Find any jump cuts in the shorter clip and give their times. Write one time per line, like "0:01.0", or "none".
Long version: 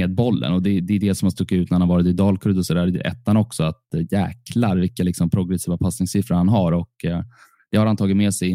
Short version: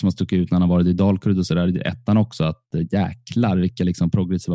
none